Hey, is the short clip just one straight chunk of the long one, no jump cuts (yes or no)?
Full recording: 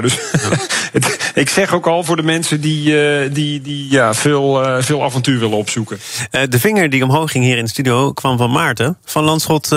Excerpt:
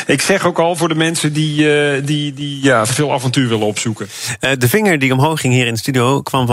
no